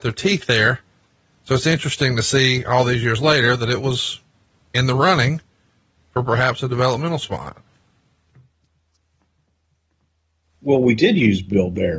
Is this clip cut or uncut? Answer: uncut